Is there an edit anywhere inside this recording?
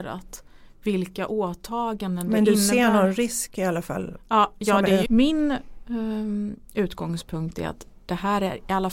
yes; 1 cut; at 5.1 s

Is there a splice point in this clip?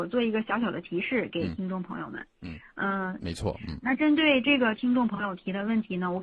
yes; 1 cut; at 3.2 s

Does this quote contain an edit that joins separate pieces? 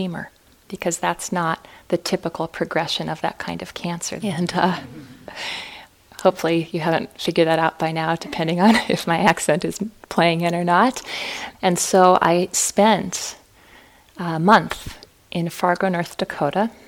yes; 2 cuts; at 4.2 s, 11.5 s

